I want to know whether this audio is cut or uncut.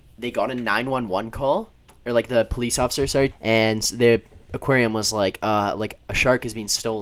cut